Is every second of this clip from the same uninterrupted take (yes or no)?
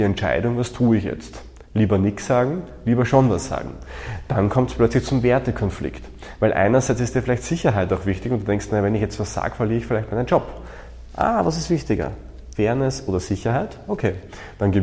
yes